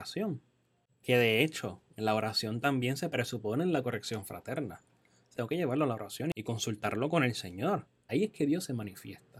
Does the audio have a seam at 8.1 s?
yes; 2 cuts; at 5.3 s, 8.1 s

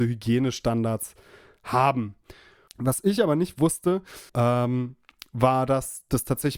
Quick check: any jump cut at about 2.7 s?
yes; 2 cuts; at 2.7 s, 4.3 s

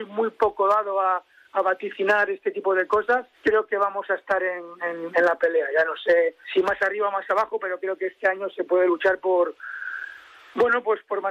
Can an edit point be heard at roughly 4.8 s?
no; 2 cuts; at 3.3 s, 6.4 s

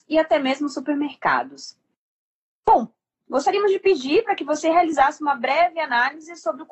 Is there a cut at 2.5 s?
no; 0 cuts

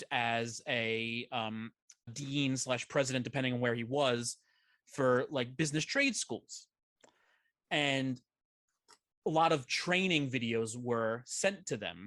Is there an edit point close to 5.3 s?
no; 1 cut; at 2.1 s

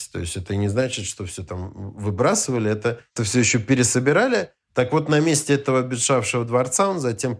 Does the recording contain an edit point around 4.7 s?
no; 1 cut; at 3.2 s

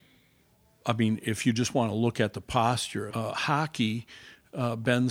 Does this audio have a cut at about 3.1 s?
yes; 1 cut; at 3.1 s

